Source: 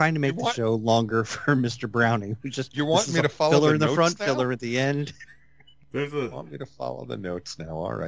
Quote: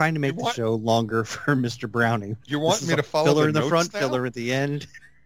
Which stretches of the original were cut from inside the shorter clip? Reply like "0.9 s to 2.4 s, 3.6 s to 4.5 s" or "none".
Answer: 2.4 s to 2.7 s